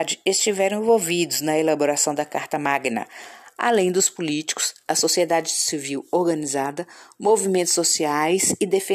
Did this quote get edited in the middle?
no; 0 cuts

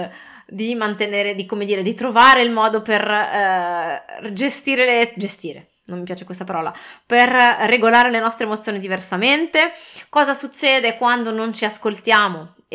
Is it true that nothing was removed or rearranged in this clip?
yes; 0 cuts

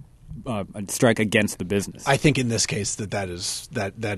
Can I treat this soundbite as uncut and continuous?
yes; 0 cuts

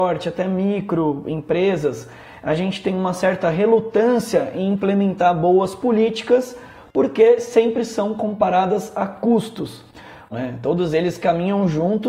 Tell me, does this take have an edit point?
yes; 1 cut; at 10.3 s

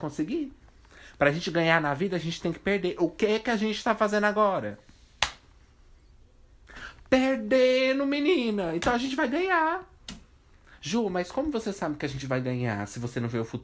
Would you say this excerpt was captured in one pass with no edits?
yes; 0 cuts

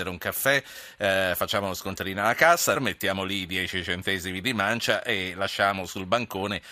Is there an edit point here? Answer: yes; 1 cut; at 2.7 s

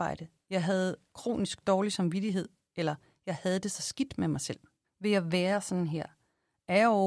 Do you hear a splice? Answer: yes; 1 cut; at 4.8 s

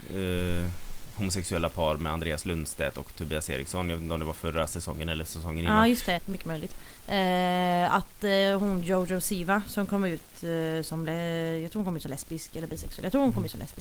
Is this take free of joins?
no; 1 cut; at 6.2 s

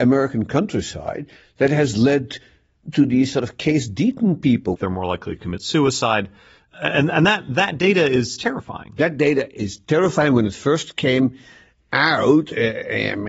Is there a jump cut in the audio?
yes; 1 cut; at 4.8 s

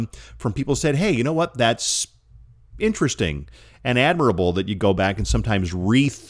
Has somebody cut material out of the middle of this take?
no; 0 cuts

